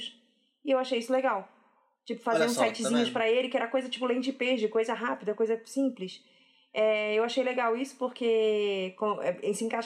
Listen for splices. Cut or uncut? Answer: uncut